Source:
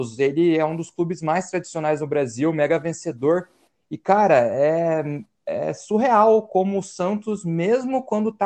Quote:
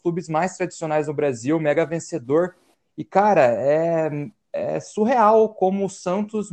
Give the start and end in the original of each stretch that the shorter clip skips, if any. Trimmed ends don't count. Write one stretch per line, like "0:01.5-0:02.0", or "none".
none